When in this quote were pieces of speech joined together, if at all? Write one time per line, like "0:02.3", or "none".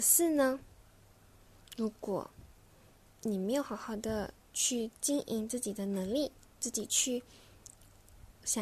none